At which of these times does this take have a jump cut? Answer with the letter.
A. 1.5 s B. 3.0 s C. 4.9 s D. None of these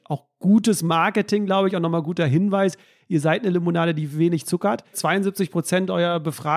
C